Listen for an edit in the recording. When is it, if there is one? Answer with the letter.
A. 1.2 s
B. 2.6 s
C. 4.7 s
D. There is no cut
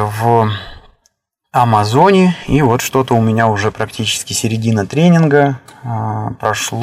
D